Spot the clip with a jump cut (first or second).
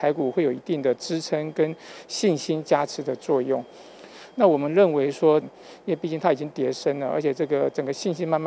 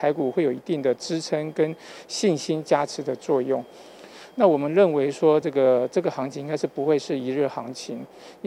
first